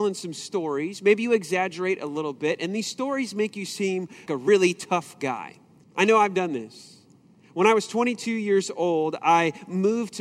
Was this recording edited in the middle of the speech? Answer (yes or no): yes